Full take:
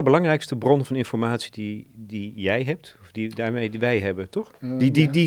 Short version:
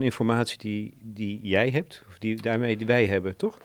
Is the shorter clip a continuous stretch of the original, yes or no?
yes